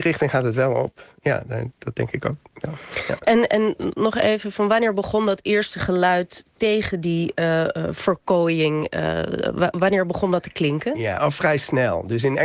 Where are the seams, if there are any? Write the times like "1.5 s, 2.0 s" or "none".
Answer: 11.2 s